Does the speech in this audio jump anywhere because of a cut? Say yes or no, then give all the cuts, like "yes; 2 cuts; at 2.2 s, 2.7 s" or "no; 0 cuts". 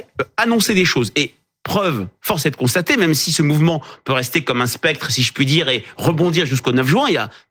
no; 0 cuts